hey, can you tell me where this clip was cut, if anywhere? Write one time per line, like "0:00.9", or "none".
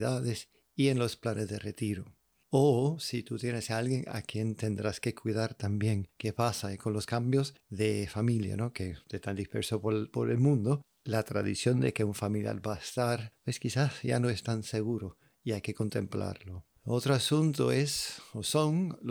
0:02.4